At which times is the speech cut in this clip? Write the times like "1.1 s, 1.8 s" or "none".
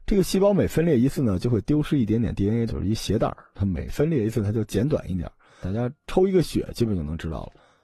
2.7 s, 5.6 s